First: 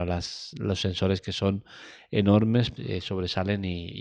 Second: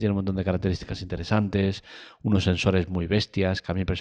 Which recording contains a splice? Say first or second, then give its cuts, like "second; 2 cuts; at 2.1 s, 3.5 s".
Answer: first; 1 cut; at 2.8 s